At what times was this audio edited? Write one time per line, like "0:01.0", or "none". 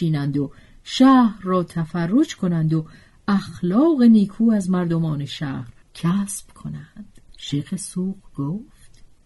0:05.8
0:07.3

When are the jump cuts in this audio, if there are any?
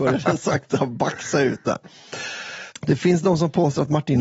0:02.7

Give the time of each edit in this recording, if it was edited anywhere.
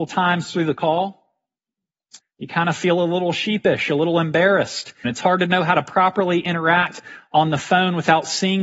0:02.2
0:05.0

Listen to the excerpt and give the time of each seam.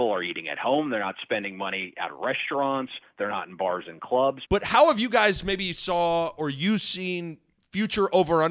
0:04.5

